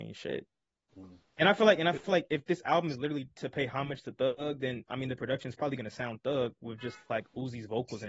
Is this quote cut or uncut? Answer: cut